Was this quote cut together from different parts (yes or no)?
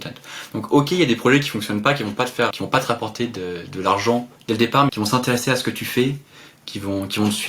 yes